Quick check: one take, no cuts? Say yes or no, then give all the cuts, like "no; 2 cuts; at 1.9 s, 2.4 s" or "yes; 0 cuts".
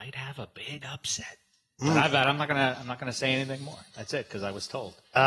yes; 0 cuts